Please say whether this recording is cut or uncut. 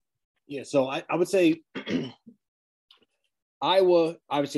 uncut